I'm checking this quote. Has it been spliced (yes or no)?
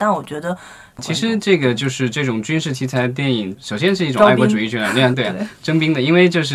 yes